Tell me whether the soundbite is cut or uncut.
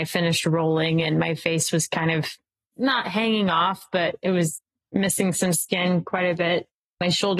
uncut